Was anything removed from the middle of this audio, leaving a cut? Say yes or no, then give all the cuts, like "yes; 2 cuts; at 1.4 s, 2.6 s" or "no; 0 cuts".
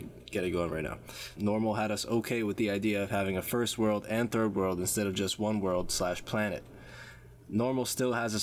yes; 1 cut; at 1.4 s